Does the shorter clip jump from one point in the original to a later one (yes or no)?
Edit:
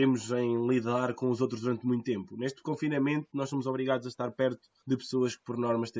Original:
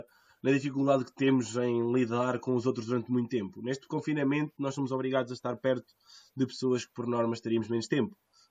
yes